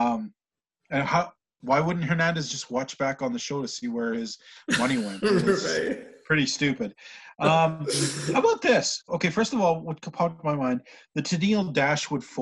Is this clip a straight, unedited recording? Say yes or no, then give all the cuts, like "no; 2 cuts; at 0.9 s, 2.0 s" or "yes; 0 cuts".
no; 1 cut; at 9.1 s